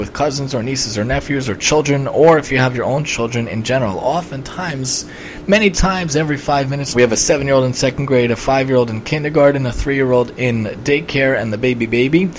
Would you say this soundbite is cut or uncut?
cut